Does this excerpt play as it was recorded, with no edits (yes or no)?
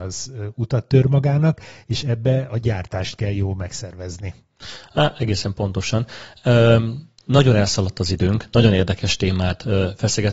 yes